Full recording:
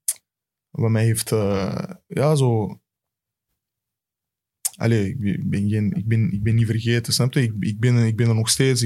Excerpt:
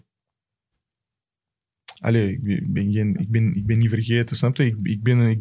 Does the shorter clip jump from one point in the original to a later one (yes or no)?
no